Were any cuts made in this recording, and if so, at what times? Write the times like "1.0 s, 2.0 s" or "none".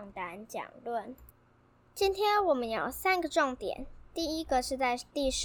none

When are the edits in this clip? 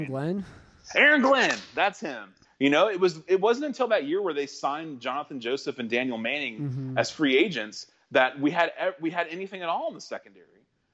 2.4 s

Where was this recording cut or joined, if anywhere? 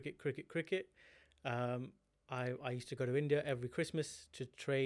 none

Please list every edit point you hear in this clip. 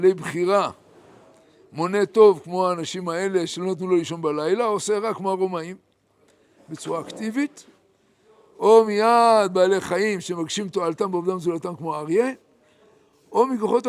none

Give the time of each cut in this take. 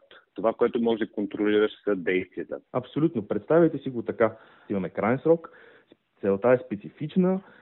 2.7 s, 4.7 s

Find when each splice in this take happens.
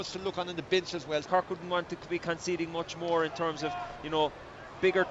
1.2 s

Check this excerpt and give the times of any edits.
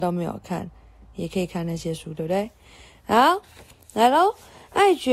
none

